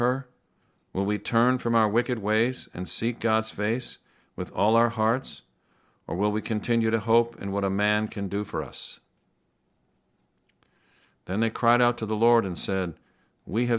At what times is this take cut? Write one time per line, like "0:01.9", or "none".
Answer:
0:11.1